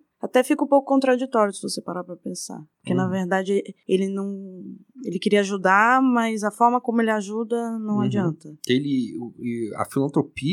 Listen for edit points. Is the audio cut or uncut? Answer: uncut